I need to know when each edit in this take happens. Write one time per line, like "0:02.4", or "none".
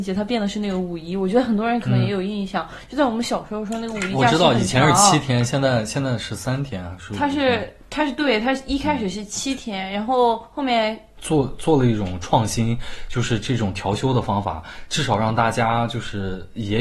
0:11.2